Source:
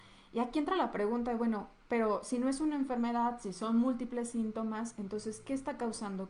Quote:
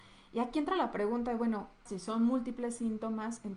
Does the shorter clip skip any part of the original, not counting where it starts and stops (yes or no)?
yes